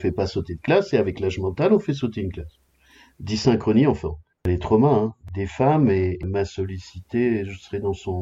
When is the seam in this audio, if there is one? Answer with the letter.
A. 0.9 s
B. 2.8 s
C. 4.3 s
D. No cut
C